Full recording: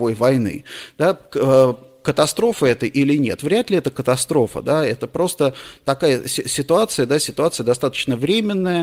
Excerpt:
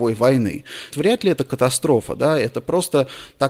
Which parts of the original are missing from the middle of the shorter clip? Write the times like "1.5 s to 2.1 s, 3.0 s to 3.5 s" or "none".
0.9 s to 3.4 s